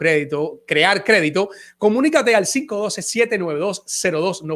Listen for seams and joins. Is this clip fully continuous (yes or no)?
yes